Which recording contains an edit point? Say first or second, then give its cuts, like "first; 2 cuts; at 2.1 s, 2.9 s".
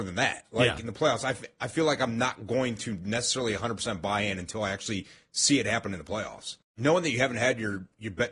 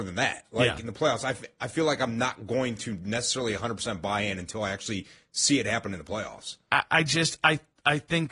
first; 1 cut; at 6.6 s